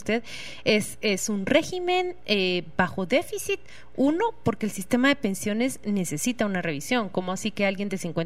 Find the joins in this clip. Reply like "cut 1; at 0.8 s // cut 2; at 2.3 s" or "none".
none

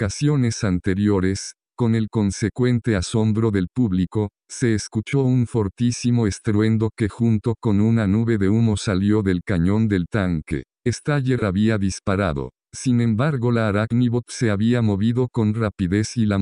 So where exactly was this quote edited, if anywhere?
none

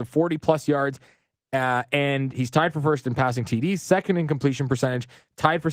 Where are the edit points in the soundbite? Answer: none

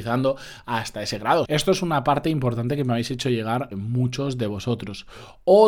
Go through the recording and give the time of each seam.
cut 1; at 1.4 s // cut 2; at 3.7 s

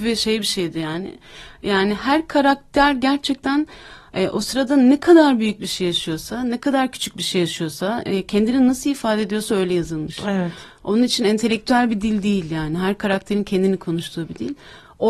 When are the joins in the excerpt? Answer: none

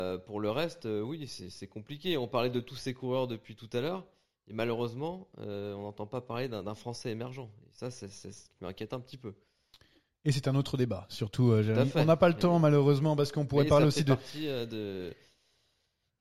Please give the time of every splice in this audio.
none

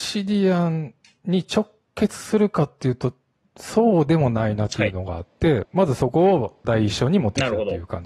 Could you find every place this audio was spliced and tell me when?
cut 1; at 5.6 s // cut 2; at 6.6 s

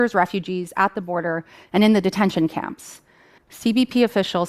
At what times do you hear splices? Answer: cut 1; at 3.4 s

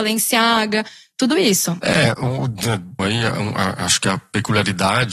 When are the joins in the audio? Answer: cut 1; at 1.8 s // cut 2; at 3.0 s

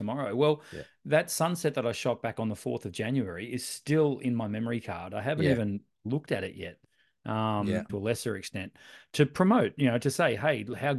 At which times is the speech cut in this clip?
cut 1; at 7.9 s

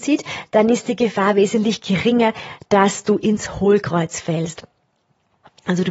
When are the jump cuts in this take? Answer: none

